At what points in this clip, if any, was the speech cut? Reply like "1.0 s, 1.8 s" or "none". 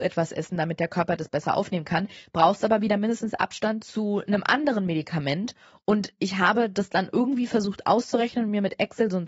none